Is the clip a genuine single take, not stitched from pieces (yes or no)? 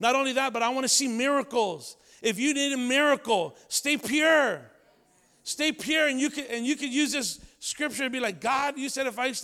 yes